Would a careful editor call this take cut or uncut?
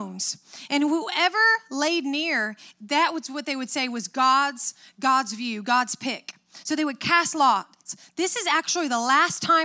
uncut